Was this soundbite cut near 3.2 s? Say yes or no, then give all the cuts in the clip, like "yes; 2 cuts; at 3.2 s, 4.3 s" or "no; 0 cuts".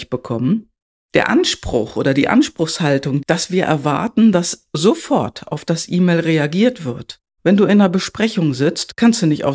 yes; 2 cuts; at 3.2 s, 7.4 s